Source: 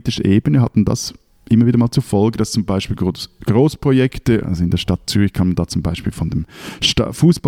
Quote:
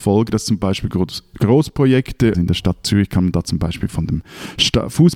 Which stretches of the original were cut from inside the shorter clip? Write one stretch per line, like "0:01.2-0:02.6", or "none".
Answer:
0:04.4-0:04.6

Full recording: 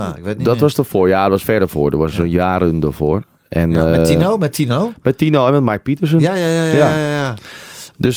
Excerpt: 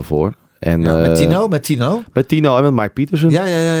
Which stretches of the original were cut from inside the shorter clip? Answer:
none

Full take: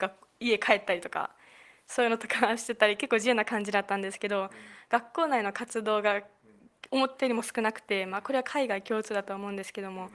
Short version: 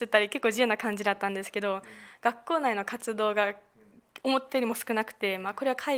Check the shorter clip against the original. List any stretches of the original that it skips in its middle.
none

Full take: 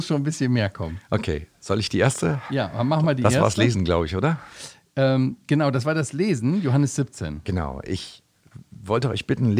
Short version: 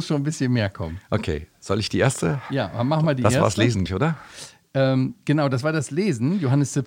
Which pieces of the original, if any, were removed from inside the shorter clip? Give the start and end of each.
0:03.9-0:04.1

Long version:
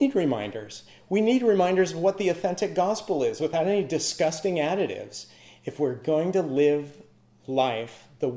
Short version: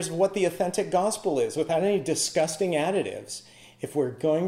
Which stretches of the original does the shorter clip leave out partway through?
none

